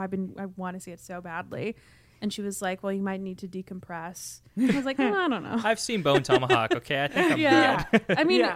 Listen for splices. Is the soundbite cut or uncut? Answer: uncut